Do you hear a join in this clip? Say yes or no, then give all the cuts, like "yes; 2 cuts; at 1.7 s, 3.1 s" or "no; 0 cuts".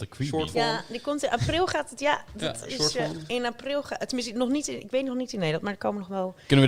no; 0 cuts